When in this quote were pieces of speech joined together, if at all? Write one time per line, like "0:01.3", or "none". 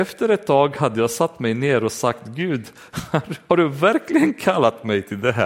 0:03.5